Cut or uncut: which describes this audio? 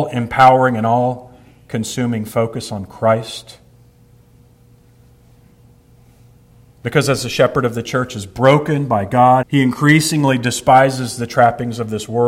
cut